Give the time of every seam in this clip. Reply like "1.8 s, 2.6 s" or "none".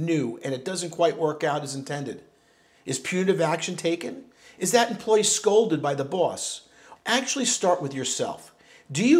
7.0 s